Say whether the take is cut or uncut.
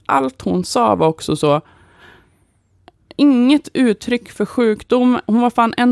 uncut